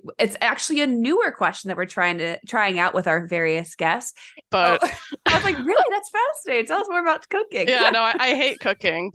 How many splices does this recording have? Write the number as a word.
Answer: one